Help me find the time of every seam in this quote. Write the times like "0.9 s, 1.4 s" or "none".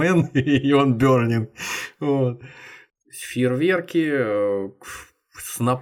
3.0 s